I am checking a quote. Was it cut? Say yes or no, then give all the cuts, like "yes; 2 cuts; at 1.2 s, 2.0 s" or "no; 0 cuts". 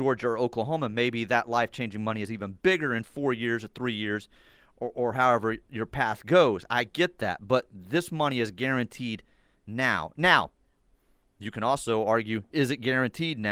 no; 0 cuts